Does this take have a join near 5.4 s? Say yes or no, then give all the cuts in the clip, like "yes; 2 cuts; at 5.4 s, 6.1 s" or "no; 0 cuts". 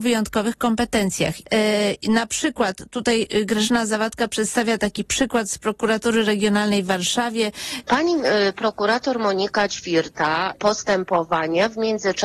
no; 3 cuts; at 1.4 s, 7.8 s, 10.5 s